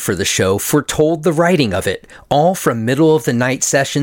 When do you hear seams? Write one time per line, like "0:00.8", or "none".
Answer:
none